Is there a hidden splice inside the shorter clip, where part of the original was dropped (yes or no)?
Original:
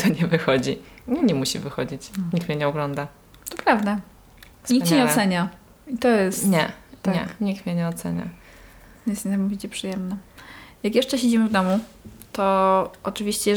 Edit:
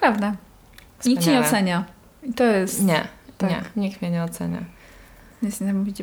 no